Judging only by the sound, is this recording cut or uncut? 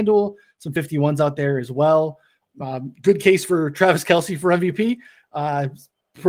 uncut